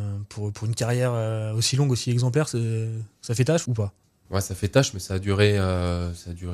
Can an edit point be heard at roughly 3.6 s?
yes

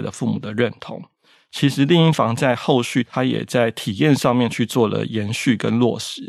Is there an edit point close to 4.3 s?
no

